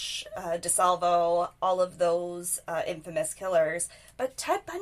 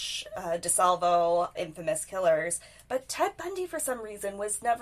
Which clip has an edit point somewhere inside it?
second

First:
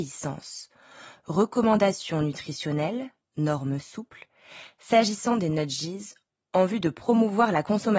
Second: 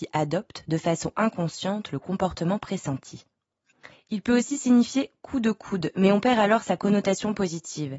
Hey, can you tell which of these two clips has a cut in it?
second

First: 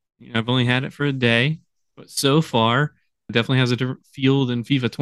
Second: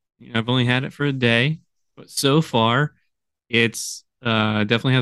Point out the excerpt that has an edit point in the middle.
first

